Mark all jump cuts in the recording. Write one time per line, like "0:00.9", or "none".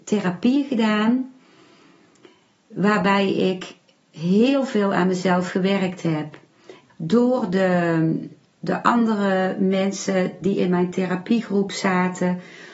0:06.9
0:08.4